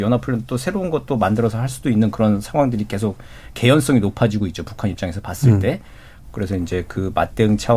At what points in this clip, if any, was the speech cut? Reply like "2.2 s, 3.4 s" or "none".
6.2 s